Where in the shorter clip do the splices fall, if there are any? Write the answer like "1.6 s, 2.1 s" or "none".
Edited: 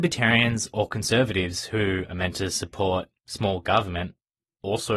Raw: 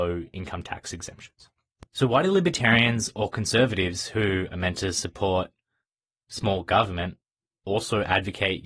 3.2 s